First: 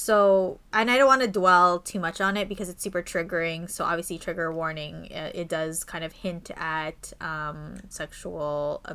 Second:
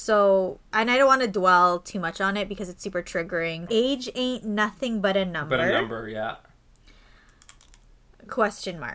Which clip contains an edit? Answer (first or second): second